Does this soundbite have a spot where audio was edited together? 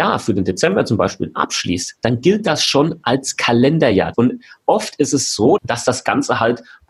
yes; 2 cuts; at 4.1 s, 5.6 s

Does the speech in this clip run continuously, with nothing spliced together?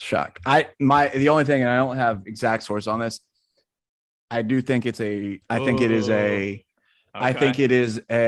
no; 1 cut; at 5.4 s

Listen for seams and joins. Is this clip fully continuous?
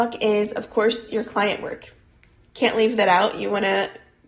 yes; 0 cuts

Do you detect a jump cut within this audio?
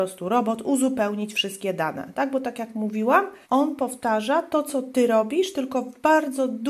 yes; 1 cut; at 3.4 s

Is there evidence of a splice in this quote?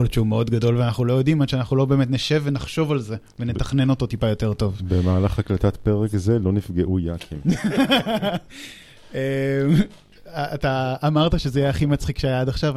no; 0 cuts

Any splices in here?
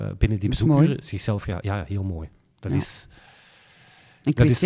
no; 0 cuts

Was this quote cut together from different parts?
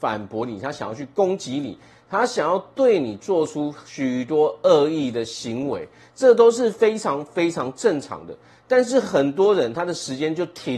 no; 0 cuts

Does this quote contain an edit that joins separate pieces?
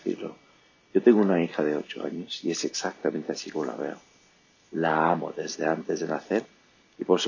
no; 0 cuts

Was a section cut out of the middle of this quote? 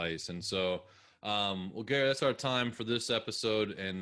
no; 0 cuts

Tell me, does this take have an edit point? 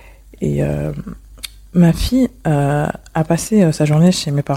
no; 0 cuts

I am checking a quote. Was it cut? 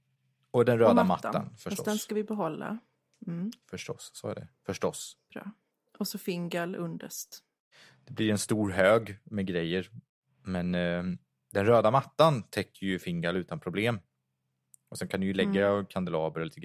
no; 0 cuts

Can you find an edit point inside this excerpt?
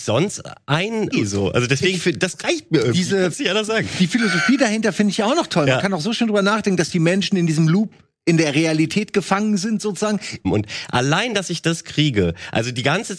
yes; 2 cuts; at 1.1 s, 10.4 s

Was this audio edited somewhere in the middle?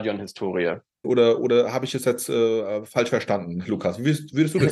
yes; 1 cut; at 1.0 s

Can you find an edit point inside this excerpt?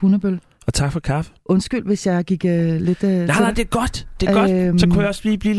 no; 0 cuts

